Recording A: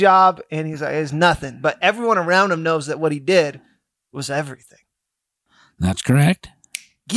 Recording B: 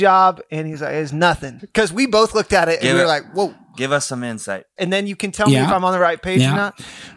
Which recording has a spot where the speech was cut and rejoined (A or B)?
B